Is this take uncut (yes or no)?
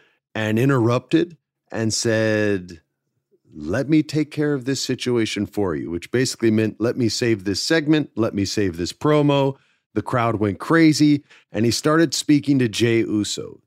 yes